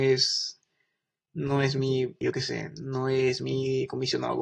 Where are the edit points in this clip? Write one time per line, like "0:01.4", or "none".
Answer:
0:02.2